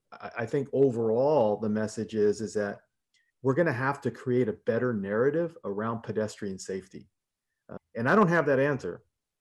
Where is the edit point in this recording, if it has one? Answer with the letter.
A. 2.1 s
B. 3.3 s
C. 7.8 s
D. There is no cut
C